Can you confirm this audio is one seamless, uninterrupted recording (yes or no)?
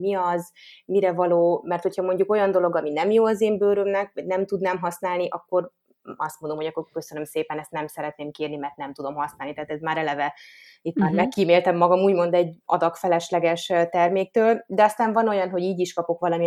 yes